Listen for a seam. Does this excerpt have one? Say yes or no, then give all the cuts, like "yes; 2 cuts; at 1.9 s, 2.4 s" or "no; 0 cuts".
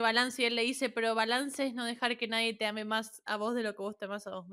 no; 0 cuts